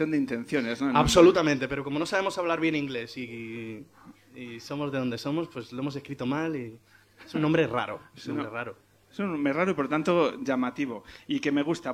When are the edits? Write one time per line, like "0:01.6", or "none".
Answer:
none